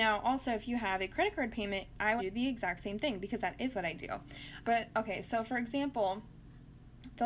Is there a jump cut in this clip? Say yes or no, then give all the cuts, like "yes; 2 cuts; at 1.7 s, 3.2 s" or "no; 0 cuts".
yes; 2 cuts; at 2.2 s, 4.6 s